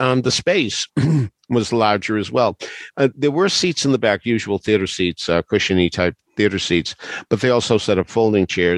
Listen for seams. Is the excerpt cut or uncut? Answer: uncut